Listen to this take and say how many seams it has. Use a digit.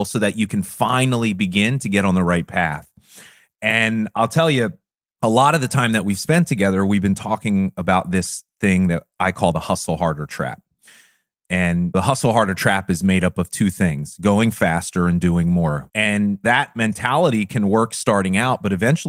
1